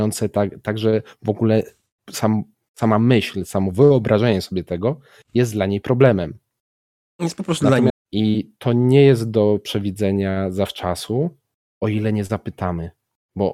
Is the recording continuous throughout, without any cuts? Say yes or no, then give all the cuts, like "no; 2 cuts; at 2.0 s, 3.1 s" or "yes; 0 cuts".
no; 1 cut; at 7.9 s